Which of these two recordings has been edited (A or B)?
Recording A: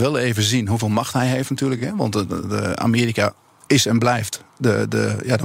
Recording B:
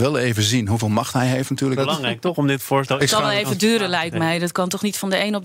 B